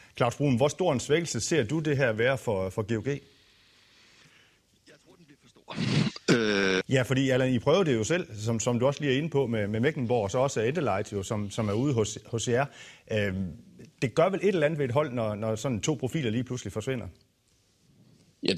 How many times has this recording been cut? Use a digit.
1